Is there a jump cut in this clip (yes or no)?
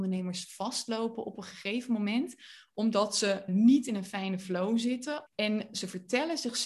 yes